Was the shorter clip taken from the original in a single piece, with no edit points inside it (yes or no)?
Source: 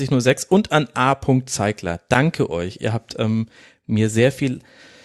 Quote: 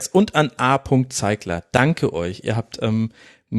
yes